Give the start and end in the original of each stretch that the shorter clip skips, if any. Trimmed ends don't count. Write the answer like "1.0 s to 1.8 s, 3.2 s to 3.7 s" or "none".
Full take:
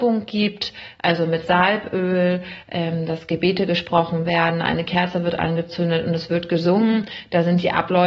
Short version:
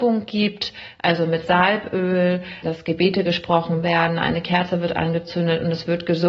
2.6 s to 3.1 s